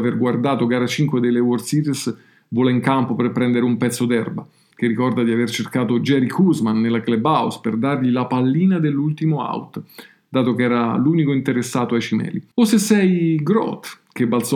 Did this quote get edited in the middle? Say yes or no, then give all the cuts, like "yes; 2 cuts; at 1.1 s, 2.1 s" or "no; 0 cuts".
yes; 2 cuts; at 4.7 s, 12.5 s